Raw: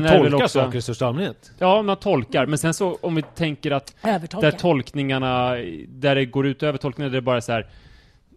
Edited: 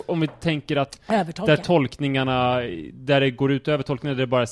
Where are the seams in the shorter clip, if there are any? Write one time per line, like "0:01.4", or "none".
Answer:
none